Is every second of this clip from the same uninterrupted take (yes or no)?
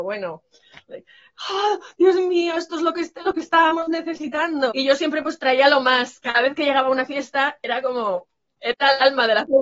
no